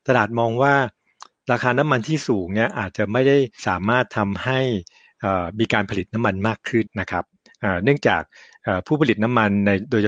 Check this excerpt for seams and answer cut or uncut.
cut